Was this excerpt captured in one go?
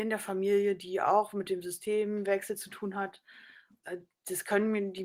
no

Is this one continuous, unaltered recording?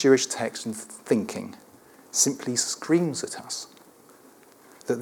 yes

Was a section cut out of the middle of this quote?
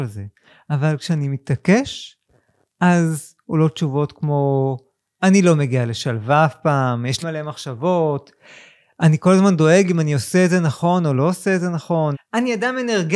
yes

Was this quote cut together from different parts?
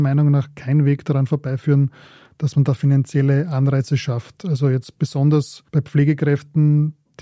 no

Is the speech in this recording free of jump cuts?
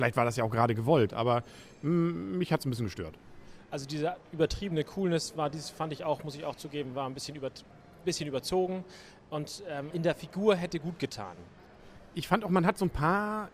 no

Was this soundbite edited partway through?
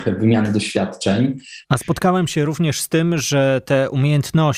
yes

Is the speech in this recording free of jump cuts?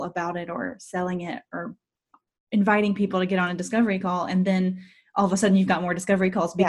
yes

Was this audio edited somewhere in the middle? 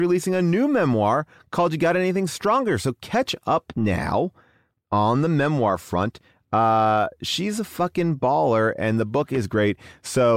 no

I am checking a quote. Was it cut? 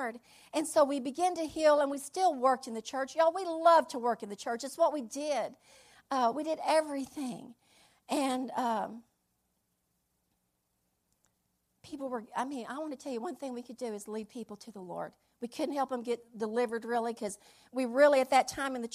no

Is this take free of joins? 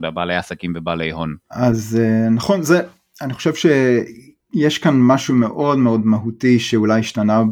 no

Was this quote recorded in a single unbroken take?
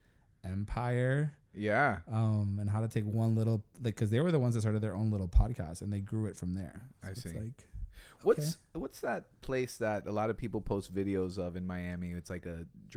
yes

